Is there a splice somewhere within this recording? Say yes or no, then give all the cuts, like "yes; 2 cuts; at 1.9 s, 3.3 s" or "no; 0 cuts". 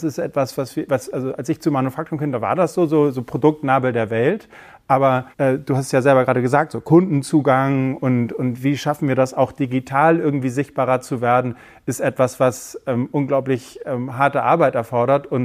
yes; 1 cut; at 5.3 s